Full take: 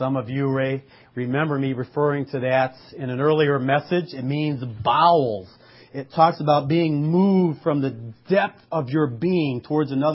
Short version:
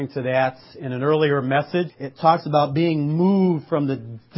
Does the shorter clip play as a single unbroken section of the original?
no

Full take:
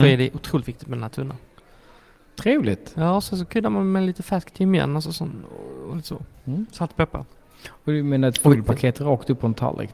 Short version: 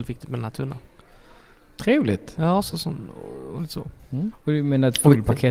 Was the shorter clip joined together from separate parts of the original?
yes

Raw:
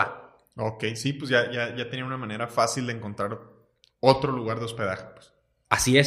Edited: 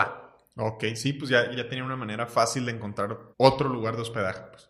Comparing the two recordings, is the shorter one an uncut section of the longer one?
no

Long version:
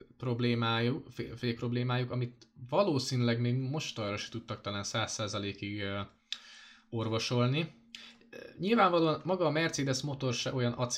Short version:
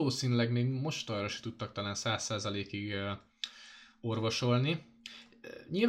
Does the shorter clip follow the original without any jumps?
yes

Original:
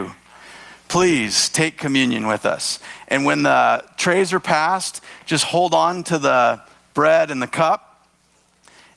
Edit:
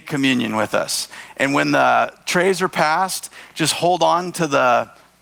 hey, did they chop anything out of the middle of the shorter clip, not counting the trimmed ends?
no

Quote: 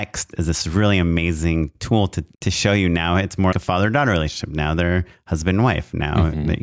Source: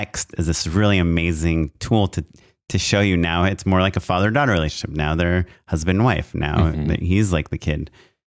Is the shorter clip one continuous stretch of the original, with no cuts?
no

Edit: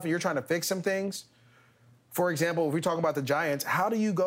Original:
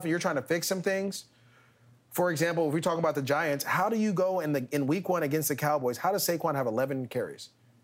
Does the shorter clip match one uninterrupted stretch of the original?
yes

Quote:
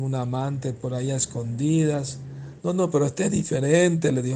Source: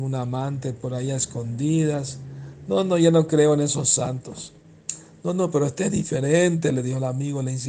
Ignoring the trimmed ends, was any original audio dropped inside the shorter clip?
yes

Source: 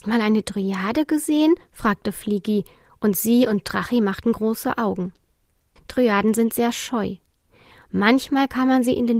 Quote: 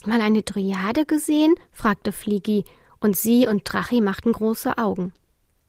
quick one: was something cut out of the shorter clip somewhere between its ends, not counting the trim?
no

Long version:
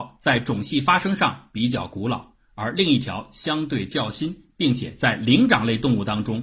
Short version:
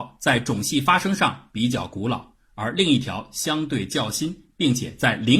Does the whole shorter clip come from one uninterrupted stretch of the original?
yes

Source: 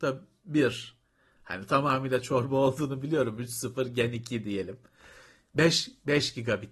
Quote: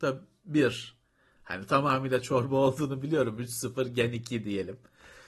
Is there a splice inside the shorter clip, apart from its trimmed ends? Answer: no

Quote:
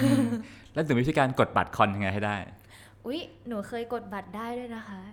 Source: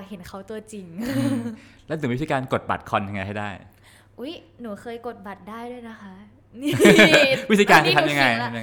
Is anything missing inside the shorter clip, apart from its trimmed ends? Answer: no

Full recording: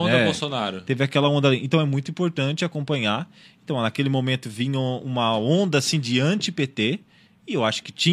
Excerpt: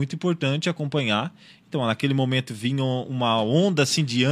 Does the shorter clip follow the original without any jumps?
yes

